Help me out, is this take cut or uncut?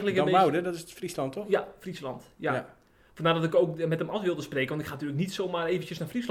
uncut